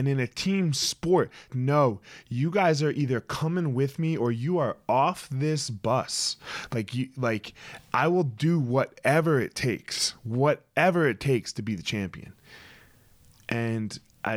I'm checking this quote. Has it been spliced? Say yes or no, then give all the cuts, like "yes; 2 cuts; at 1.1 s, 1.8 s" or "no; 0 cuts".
yes; 1 cut; at 1.5 s